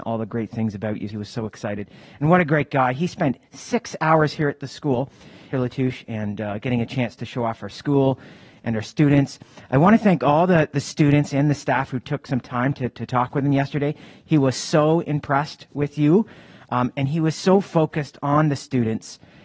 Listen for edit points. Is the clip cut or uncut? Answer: cut